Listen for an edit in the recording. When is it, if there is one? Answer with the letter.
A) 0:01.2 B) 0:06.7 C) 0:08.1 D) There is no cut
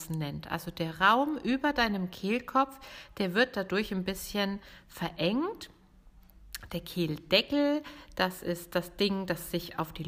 D